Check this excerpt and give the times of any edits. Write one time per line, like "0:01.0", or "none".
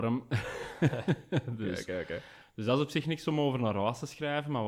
0:02.4